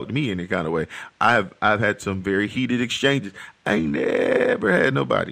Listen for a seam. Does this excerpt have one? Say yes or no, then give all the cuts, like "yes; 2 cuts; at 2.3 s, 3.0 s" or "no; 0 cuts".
no; 0 cuts